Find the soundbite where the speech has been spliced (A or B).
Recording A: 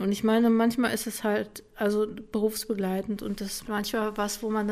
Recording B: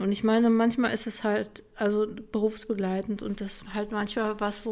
A